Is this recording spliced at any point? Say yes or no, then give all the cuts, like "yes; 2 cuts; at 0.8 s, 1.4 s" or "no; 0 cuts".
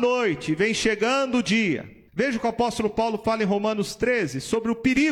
yes; 1 cut; at 2.1 s